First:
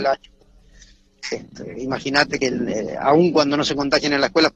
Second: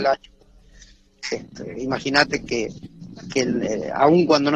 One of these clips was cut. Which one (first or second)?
first